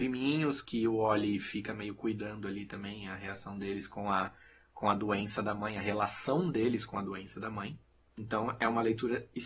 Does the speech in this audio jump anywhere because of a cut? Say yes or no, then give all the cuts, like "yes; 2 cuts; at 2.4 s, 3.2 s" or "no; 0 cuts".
no; 0 cuts